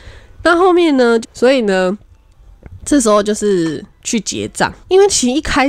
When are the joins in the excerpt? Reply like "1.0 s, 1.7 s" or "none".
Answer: 1.2 s